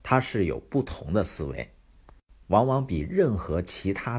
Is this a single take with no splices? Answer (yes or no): no